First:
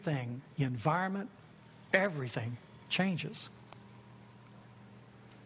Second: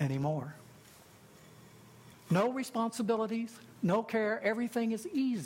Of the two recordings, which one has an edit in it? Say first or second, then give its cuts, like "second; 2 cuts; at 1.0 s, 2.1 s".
second; 2 cuts; at 2.1 s, 4.4 s